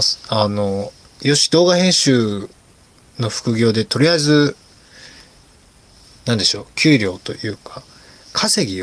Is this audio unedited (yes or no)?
yes